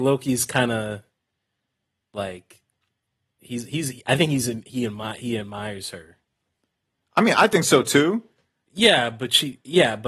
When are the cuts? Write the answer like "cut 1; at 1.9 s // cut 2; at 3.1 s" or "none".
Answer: cut 1; at 8.7 s